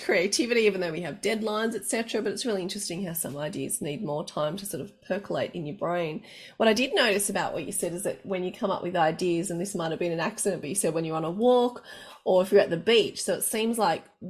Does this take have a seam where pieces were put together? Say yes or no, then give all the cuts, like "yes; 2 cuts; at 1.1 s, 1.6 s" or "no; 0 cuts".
no; 0 cuts